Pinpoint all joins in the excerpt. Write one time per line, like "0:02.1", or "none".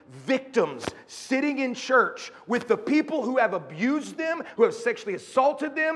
0:04.6